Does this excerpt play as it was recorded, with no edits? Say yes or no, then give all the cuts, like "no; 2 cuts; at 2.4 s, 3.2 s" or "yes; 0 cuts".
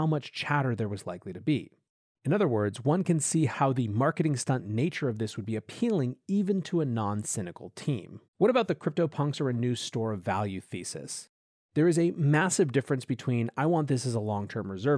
no; 1 cut; at 8.3 s